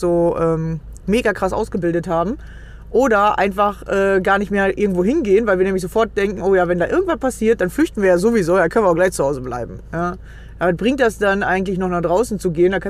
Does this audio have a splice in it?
no; 0 cuts

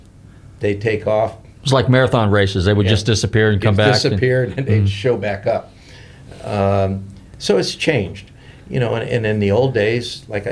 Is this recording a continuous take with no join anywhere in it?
yes; 0 cuts

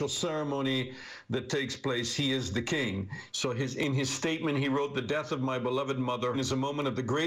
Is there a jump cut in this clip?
yes; 2 cuts; at 3.3 s, 6.3 s

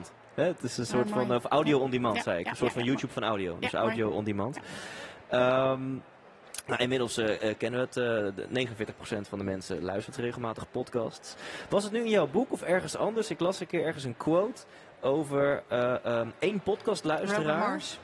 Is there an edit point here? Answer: no; 0 cuts

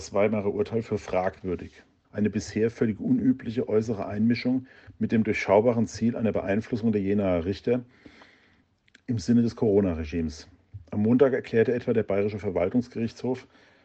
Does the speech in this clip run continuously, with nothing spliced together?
no; 1 cut; at 2.0 s

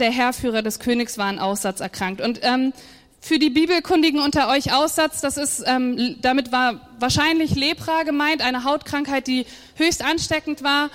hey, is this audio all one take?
yes; 0 cuts

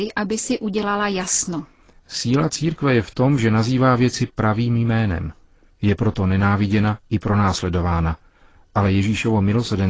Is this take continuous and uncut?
yes; 0 cuts

